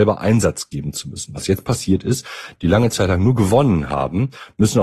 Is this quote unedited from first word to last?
no; 1 cut; at 2.6 s

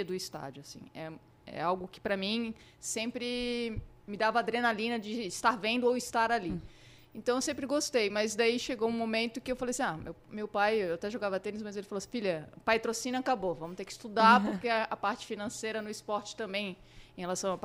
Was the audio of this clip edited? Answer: no; 0 cuts

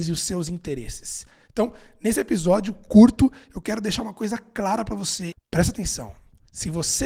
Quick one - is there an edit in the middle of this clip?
yes; 1 cut; at 5.3 s

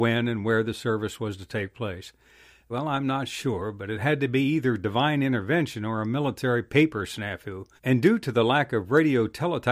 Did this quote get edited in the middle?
yes; 2 cuts; at 2.7 s, 7.8 s

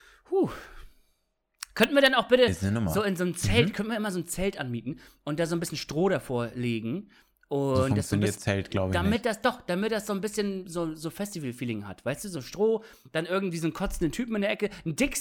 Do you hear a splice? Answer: no; 0 cuts

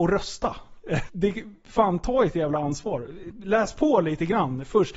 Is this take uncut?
no; 1 cut; at 1.1 s

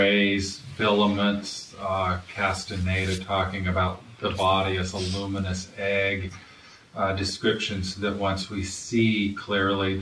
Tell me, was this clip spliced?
no; 0 cuts

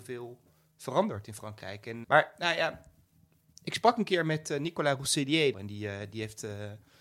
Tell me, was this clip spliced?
yes; 2 cuts; at 2.0 s, 5.5 s

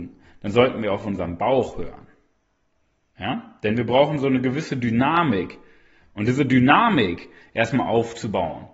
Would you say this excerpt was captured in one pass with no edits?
yes; 0 cuts

